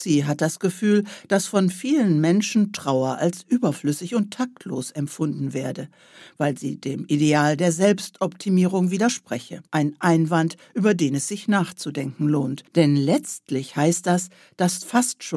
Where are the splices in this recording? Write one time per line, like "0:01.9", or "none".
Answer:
0:09.7
0:12.7